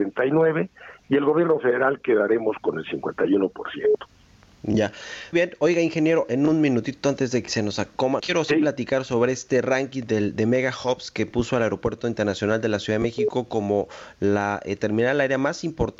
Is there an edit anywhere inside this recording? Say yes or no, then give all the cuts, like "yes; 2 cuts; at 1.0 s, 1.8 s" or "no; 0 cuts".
yes; 2 cuts; at 5.3 s, 8.2 s